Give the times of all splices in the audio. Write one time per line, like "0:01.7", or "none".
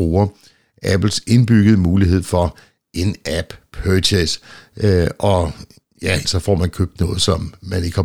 0:06.2